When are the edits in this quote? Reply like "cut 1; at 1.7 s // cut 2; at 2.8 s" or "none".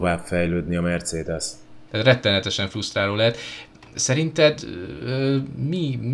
cut 1; at 1.9 s